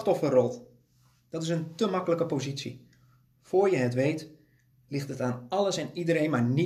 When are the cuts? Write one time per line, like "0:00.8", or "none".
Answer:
none